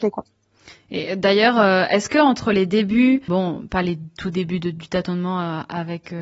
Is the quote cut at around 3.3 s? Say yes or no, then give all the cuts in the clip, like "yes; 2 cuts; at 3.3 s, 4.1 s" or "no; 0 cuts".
yes; 1 cut; at 3.3 s